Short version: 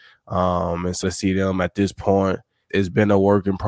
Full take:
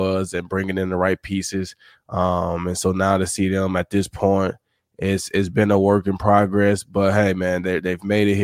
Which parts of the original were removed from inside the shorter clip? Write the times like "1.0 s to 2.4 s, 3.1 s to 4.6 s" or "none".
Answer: 2.8 s to 3.2 s, 4.8 s to 5.3 s